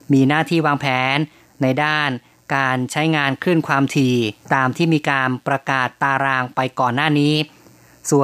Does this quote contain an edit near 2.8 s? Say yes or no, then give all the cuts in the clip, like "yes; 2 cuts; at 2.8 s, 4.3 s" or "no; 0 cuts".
no; 1 cut; at 4.4 s